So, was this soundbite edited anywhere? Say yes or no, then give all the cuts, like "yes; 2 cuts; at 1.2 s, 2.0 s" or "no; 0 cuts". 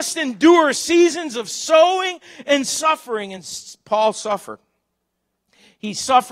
no; 0 cuts